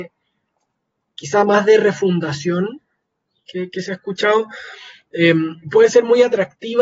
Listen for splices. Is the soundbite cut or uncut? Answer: uncut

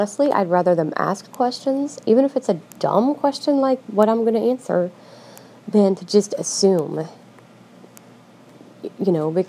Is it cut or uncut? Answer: uncut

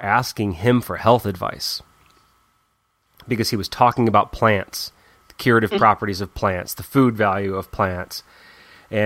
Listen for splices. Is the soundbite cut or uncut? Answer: uncut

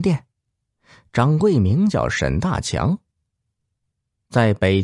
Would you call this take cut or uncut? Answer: uncut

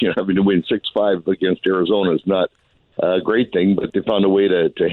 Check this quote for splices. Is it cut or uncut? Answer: uncut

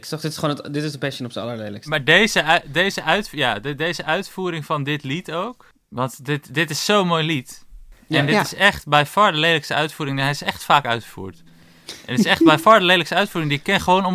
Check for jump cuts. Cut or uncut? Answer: uncut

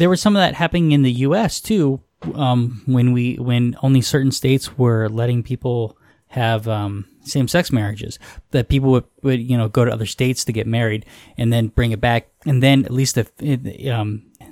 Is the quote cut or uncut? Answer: uncut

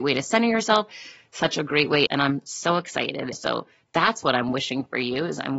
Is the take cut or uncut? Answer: cut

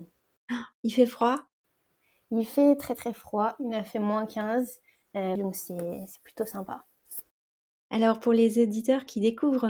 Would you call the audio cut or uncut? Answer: cut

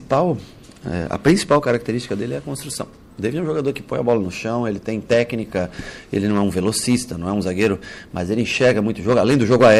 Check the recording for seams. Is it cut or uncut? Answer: uncut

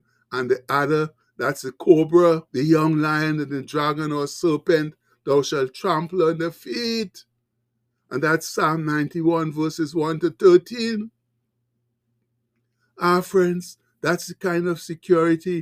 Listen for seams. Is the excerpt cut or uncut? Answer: cut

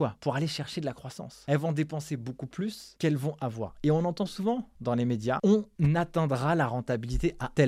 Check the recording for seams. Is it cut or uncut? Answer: uncut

